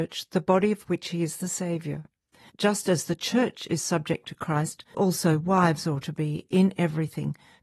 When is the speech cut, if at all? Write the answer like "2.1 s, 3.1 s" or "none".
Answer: 4.9 s

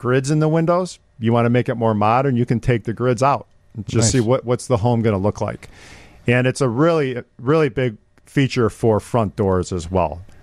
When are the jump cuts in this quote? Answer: none

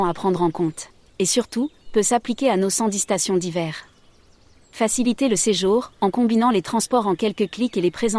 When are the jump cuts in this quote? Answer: 1.1 s

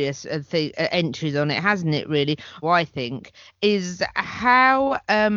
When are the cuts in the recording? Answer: 2.6 s

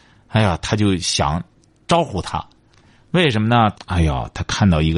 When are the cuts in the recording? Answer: 3.7 s

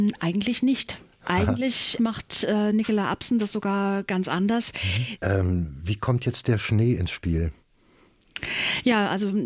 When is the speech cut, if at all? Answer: 5.2 s

